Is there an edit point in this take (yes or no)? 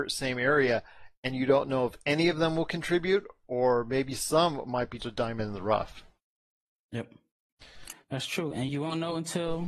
yes